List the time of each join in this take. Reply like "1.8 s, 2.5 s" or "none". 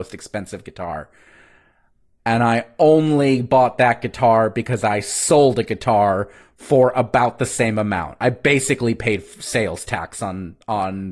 2.2 s

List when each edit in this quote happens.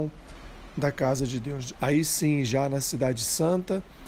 1.7 s

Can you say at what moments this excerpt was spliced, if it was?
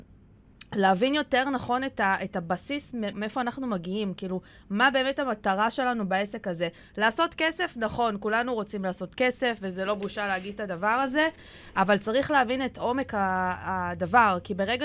3.1 s

